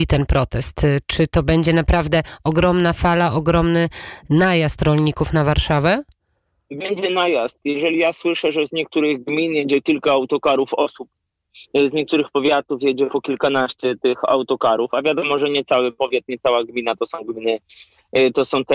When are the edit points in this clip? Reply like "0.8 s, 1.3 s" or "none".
none